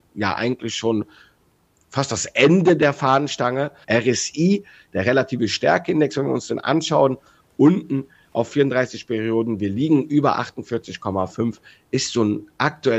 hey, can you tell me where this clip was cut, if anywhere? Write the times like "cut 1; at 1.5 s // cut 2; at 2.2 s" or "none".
cut 1; at 3.8 s